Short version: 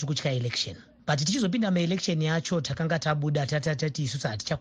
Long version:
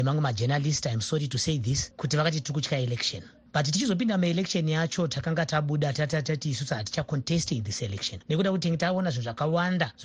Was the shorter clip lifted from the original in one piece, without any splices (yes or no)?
yes